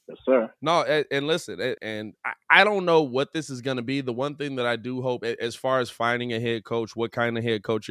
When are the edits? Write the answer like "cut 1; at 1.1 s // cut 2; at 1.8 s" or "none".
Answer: cut 1; at 1.8 s